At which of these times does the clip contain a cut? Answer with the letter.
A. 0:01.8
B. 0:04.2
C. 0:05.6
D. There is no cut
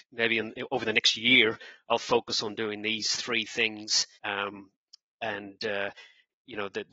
B